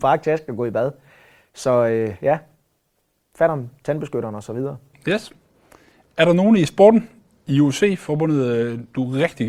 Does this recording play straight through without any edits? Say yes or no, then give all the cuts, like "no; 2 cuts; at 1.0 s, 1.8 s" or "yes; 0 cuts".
yes; 0 cuts